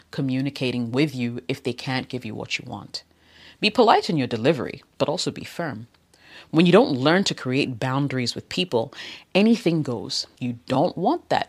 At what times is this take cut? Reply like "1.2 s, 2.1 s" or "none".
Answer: 10.4 s